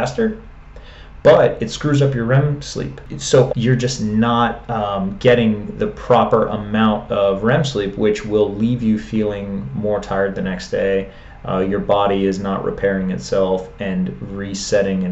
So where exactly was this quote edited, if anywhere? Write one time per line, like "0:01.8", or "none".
0:03.5